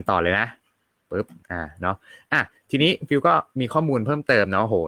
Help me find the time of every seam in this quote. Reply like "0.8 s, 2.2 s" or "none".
1.4 s